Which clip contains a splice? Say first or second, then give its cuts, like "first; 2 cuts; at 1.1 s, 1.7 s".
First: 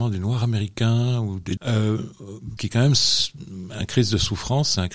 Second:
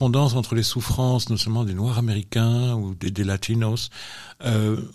first; 2 cuts; at 1.6 s, 2.6 s